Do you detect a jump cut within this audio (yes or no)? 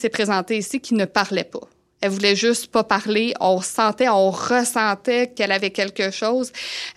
no